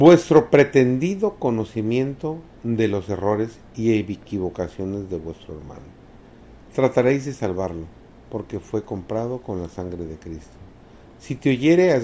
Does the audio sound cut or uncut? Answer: cut